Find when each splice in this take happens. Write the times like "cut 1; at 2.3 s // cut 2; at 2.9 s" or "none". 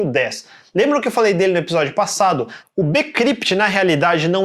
cut 1; at 2.6 s